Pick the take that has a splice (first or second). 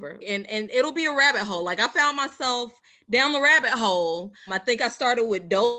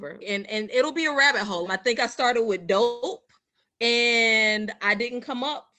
second